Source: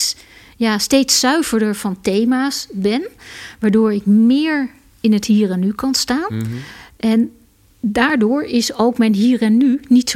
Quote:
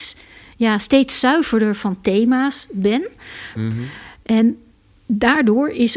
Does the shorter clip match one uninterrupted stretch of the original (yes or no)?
no